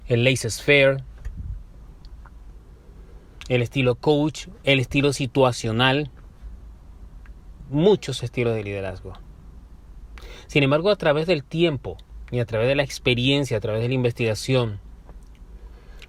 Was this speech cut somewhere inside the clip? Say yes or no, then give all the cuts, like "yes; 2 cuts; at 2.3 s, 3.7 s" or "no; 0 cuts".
no; 0 cuts